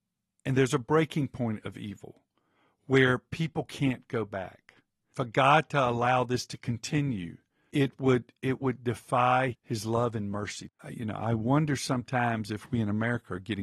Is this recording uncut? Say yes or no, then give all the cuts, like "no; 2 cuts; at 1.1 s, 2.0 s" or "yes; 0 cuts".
no; 2 cuts; at 9.5 s, 10.8 s